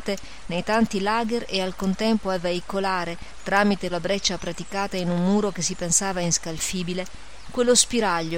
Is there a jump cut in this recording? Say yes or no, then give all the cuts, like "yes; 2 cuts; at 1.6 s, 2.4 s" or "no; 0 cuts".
yes; 1 cut; at 3.9 s